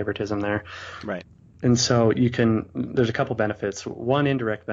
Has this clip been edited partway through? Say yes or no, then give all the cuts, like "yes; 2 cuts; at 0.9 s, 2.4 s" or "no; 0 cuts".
no; 0 cuts